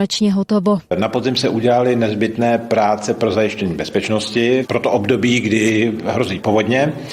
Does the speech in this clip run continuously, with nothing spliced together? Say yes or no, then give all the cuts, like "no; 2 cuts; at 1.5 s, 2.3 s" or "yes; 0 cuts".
yes; 0 cuts